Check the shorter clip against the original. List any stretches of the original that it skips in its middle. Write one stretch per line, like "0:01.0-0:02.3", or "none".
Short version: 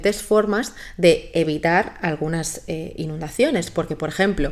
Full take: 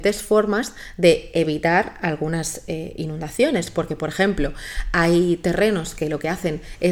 none